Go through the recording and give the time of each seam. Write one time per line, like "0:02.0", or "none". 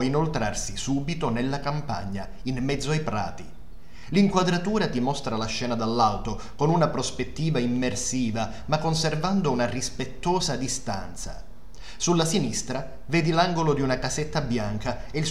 none